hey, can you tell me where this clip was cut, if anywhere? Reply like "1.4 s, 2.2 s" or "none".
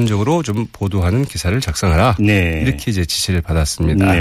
none